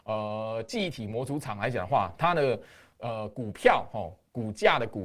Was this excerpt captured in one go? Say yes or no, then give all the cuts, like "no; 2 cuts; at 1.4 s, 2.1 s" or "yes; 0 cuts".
yes; 0 cuts